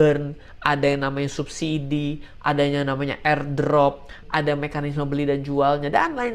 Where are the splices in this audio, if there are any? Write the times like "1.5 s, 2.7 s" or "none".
4.2 s